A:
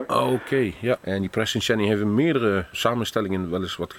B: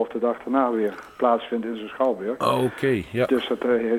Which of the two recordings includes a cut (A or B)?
A